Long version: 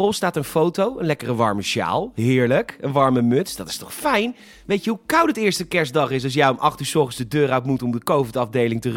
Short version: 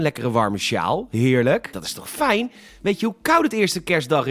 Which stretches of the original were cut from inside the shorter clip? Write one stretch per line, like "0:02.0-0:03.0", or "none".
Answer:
0:02.8-0:03.6